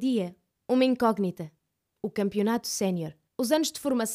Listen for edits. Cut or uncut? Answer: cut